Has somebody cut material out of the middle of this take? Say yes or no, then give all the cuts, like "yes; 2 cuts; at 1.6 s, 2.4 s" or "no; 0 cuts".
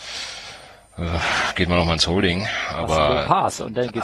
no; 0 cuts